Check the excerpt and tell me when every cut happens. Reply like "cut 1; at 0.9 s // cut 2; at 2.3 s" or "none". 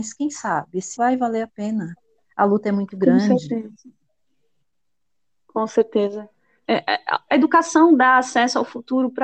cut 1; at 1.0 s // cut 2; at 6.7 s